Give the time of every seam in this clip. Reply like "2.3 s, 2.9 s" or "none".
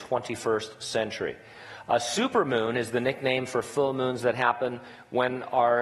none